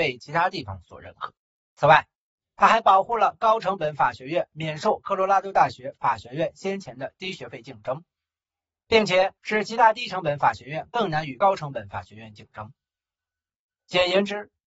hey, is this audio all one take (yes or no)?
no